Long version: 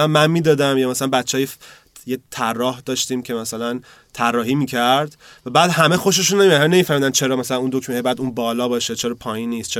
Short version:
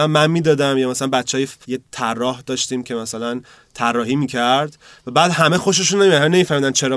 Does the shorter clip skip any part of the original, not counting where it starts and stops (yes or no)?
yes